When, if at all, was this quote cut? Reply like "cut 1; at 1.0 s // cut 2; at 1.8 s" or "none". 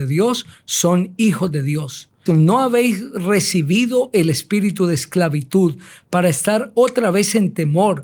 cut 1; at 2.3 s